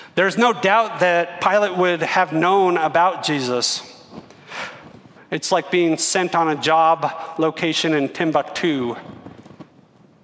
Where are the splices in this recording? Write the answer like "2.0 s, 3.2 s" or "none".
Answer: 5.2 s